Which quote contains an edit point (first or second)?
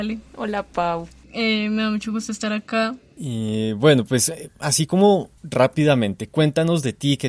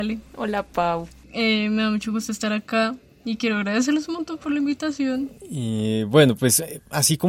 first